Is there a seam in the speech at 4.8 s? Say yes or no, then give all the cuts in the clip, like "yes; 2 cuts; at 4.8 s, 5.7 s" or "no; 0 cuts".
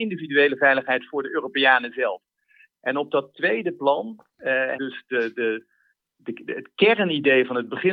yes; 1 cut; at 4.8 s